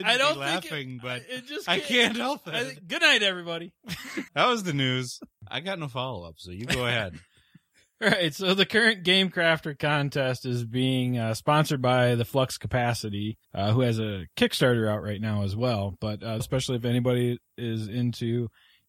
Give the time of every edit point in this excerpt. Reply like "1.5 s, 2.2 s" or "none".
4.3 s, 13.4 s, 16.4 s